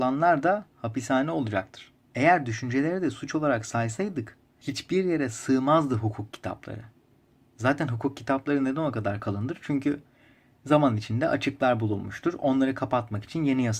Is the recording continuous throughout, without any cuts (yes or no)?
yes